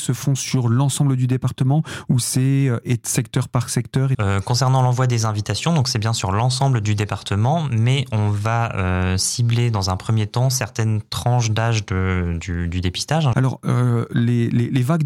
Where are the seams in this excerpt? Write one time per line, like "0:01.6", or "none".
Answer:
0:04.1
0:13.3